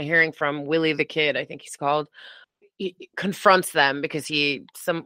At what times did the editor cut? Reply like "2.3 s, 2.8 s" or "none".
none